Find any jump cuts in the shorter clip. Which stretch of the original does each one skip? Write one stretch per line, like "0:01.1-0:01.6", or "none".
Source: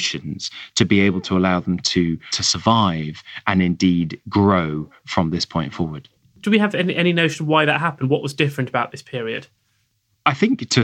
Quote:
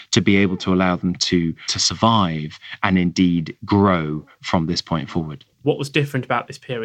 0:06.3-0:08.1